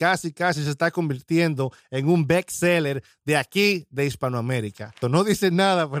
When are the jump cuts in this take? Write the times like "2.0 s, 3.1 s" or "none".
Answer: 5.0 s